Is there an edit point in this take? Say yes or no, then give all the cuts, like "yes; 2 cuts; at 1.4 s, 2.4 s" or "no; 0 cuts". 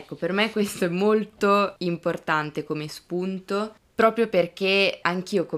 no; 0 cuts